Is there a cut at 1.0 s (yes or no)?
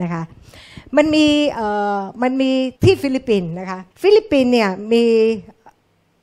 no